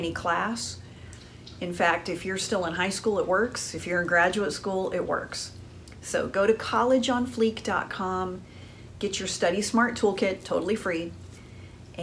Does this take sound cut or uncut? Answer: uncut